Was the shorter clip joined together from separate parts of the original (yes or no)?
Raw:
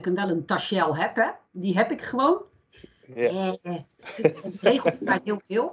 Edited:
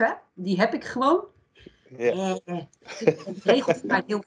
no